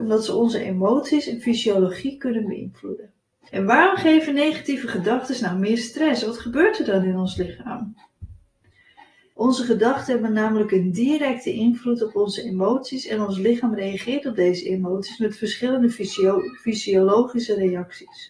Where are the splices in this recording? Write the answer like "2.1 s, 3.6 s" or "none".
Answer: 3.5 s, 9.3 s